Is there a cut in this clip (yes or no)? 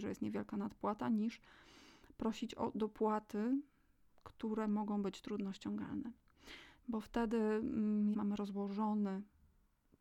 yes